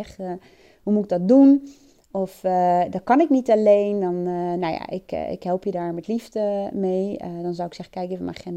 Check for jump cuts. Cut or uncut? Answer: uncut